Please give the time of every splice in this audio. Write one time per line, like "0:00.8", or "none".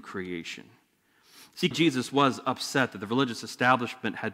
0:01.7